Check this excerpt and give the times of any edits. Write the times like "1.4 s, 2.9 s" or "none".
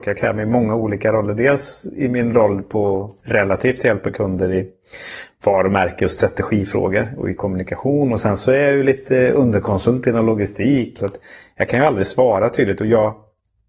3.2 s, 11.0 s

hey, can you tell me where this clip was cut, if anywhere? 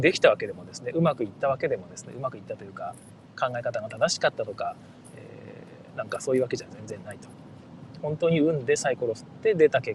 none

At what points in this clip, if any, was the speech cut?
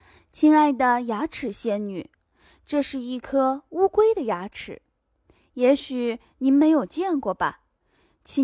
none

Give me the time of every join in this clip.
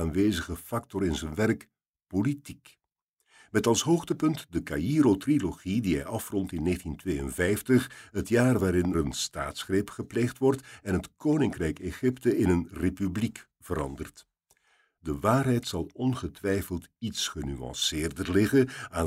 8.9 s, 15.0 s

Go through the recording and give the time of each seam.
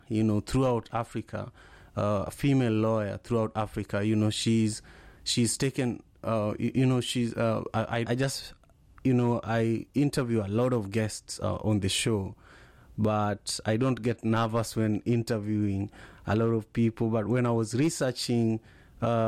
8.0 s

